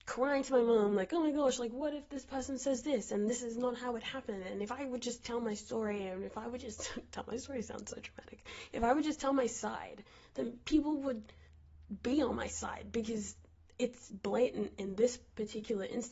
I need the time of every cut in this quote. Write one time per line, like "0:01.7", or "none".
none